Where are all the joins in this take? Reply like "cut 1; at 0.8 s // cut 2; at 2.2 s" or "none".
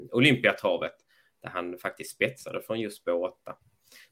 none